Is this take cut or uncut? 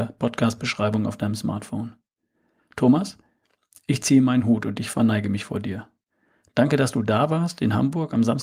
uncut